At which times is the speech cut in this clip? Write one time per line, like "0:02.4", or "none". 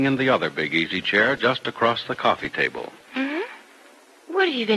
0:03.1